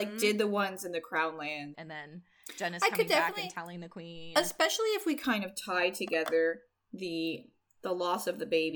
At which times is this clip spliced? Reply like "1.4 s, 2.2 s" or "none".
1.7 s